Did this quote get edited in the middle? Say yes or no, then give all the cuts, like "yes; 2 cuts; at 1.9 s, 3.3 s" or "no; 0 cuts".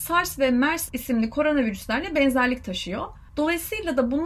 yes; 1 cut; at 3.3 s